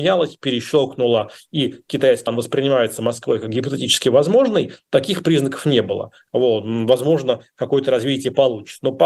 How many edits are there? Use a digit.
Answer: 2